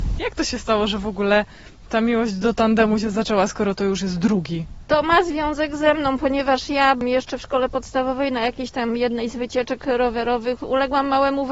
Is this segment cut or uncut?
uncut